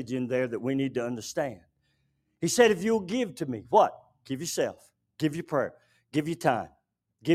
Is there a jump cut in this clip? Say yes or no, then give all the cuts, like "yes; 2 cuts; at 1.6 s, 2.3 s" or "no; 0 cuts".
no; 0 cuts